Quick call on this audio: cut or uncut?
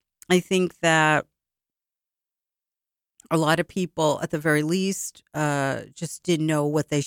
uncut